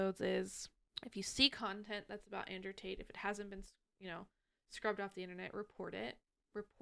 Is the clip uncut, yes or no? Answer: yes